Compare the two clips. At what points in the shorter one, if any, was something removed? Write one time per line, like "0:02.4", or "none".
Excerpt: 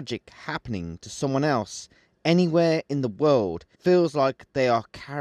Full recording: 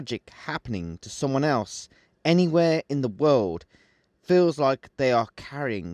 0:03.7